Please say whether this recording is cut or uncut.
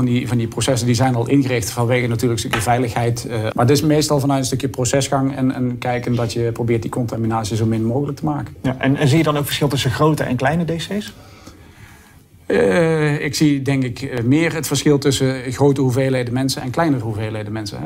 cut